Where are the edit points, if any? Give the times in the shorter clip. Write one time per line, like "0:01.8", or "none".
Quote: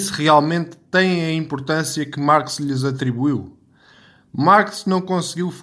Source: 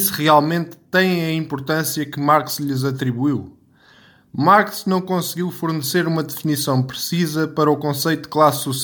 none